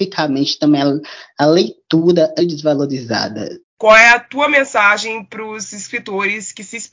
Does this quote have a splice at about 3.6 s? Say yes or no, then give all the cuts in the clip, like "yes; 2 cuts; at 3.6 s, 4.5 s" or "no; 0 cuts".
yes; 2 cuts; at 2.4 s, 3.6 s